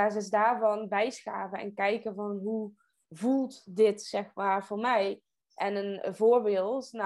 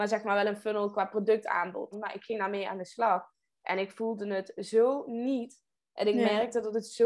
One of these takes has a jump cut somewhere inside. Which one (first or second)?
second